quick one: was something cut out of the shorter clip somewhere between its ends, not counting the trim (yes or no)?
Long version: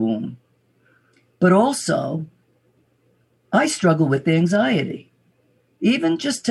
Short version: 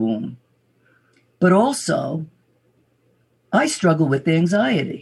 no